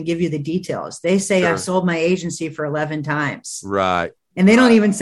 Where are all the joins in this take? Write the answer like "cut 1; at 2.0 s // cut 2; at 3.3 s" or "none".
none

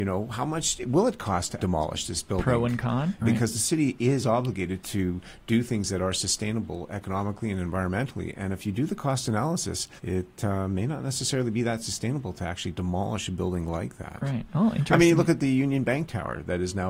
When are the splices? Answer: cut 1; at 1.6 s // cut 2; at 3.2 s // cut 3; at 10.0 s

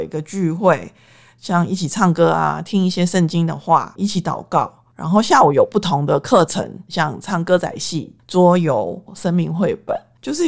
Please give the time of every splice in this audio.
cut 1; at 9.1 s

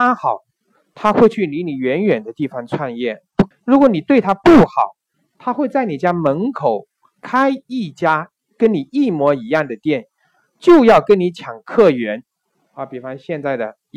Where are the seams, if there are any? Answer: cut 1; at 3.5 s

